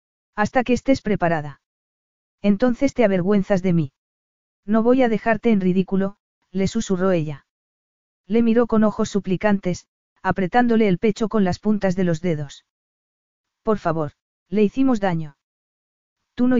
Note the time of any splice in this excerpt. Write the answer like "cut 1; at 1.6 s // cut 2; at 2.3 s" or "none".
cut 1; at 4.5 s // cut 2; at 14.4 s